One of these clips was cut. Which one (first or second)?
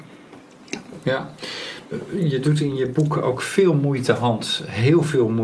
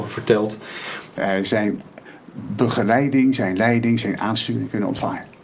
second